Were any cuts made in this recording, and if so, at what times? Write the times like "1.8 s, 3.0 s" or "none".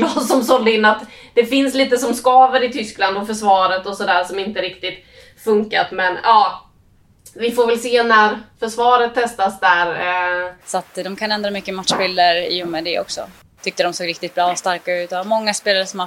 8.5 s, 10.6 s, 13.6 s

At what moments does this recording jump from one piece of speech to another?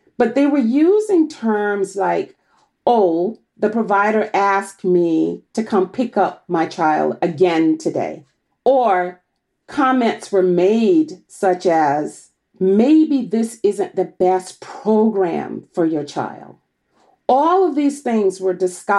none

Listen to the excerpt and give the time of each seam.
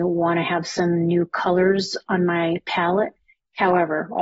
none

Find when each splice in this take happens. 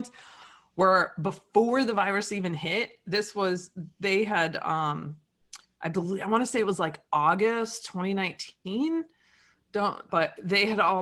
10.1 s

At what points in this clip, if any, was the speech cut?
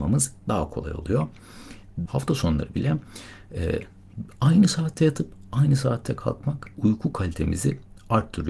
2.1 s, 6.7 s

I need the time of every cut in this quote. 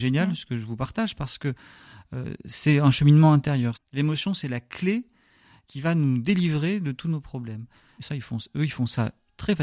3.7 s, 8.0 s

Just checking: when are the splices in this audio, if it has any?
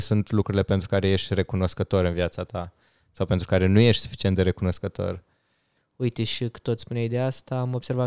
5.8 s

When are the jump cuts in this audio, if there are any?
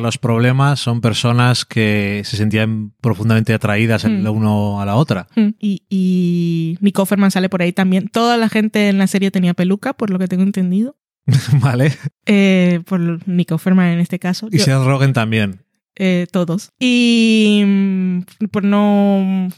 16.7 s

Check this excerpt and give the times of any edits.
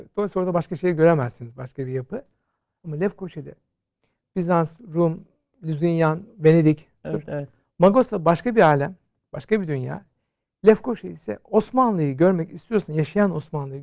7.0 s

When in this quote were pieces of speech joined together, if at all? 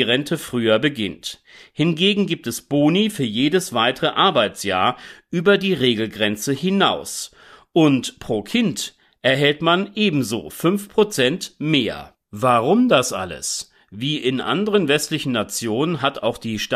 none

